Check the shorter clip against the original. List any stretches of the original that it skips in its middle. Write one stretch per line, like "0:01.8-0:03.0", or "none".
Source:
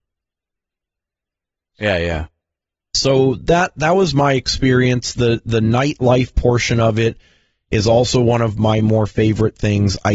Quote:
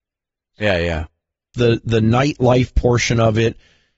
0:02.7-0:05.1